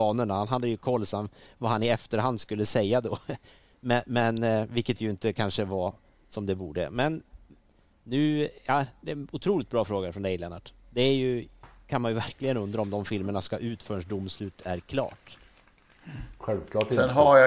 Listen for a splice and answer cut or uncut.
uncut